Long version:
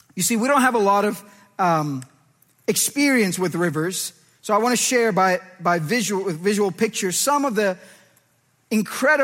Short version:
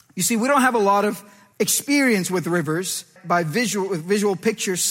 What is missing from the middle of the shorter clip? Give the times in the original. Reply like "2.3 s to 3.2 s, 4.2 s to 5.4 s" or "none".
1.5 s to 2.6 s, 4.2 s to 5.5 s